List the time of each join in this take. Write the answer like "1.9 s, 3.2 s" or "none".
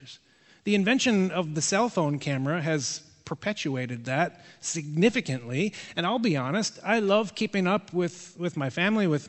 none